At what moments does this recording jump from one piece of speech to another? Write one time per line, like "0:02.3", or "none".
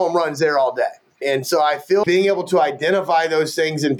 0:02.0